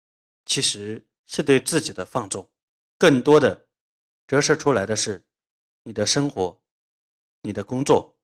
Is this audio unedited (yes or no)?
no